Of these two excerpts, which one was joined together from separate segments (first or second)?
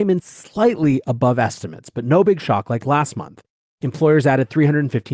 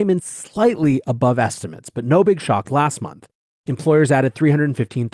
second